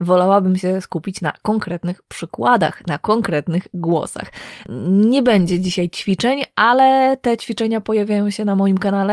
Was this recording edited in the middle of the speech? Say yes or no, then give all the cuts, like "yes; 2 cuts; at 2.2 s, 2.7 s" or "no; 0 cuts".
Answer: no; 0 cuts